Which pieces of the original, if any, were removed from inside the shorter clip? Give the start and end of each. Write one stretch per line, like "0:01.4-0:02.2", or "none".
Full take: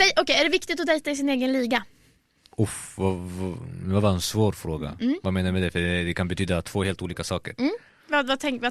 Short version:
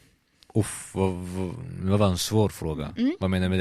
none